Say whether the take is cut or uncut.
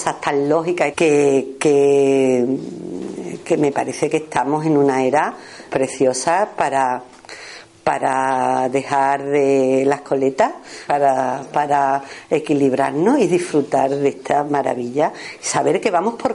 cut